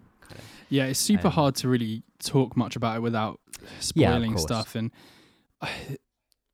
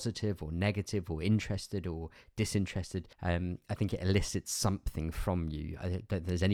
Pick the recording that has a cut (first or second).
second